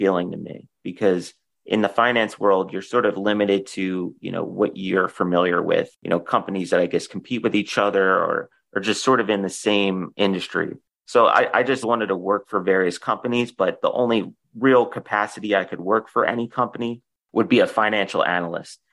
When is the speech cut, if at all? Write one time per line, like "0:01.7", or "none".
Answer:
0:11.8

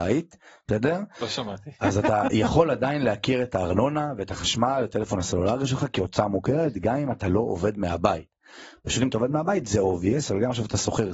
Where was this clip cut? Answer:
none

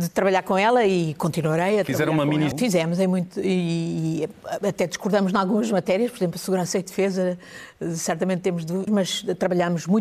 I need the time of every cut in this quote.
0:02.5
0:08.9

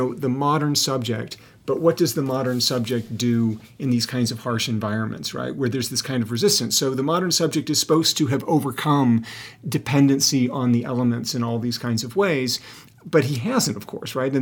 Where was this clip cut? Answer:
none

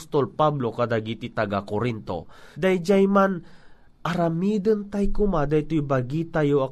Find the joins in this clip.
0:02.5

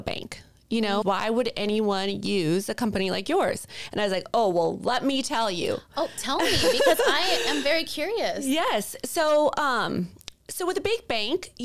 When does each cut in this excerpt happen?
0:01.0

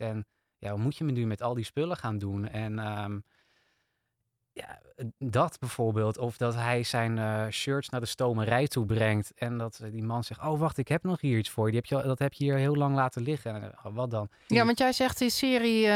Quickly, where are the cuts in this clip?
0:14.5

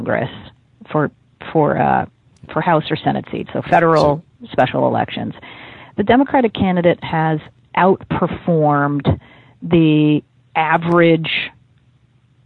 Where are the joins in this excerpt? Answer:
none

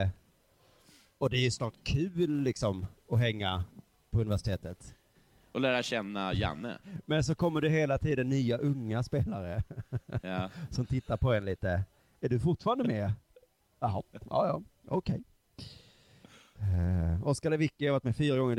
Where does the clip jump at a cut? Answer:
none

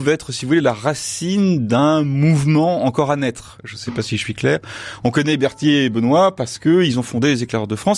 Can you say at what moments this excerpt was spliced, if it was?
none

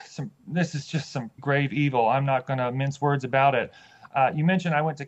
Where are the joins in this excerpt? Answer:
0:01.4

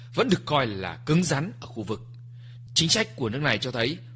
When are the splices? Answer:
0:02.7

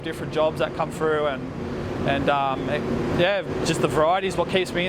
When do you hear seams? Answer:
none

